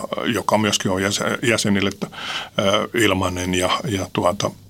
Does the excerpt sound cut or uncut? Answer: uncut